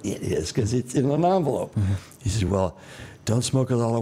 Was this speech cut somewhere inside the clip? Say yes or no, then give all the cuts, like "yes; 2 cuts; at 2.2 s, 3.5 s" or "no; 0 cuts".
no; 0 cuts